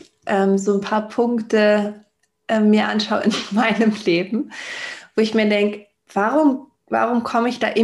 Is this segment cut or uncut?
cut